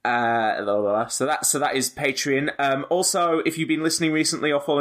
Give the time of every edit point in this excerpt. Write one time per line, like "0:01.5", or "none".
none